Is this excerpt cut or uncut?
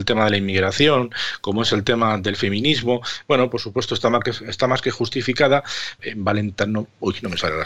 cut